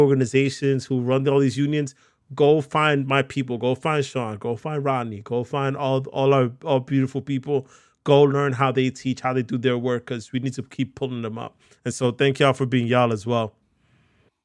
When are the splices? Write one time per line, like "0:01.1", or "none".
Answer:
none